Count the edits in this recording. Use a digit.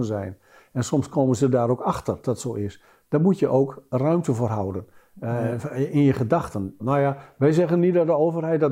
2